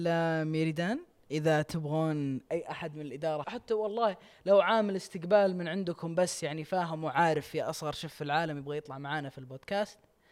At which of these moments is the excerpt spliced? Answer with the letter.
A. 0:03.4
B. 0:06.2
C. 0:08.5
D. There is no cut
A